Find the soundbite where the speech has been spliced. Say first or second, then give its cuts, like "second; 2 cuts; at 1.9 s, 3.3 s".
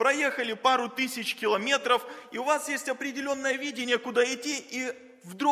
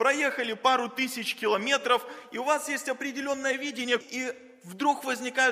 second; 1 cut; at 4.0 s